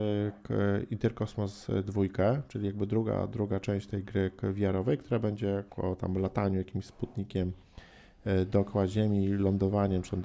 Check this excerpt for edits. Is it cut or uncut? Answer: cut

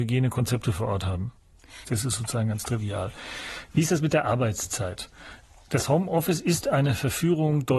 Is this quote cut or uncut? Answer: cut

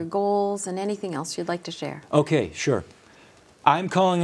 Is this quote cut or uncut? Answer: uncut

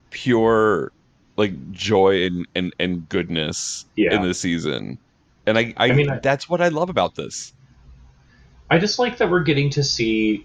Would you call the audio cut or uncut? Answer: uncut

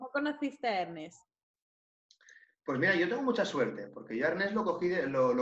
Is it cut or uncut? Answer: uncut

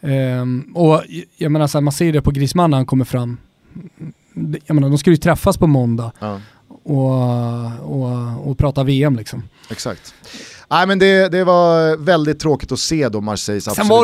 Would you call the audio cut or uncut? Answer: uncut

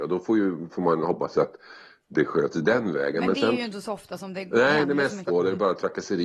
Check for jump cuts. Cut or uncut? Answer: cut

